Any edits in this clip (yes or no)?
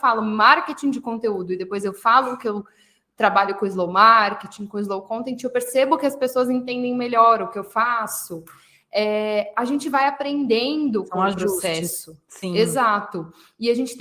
no